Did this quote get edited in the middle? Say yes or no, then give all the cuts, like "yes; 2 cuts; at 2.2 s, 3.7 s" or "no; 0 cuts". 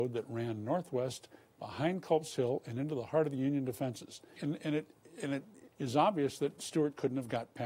yes; 2 cuts; at 4.4 s, 5.7 s